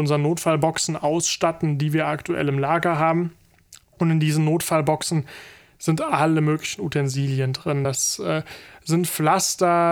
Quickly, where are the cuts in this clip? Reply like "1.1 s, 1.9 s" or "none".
none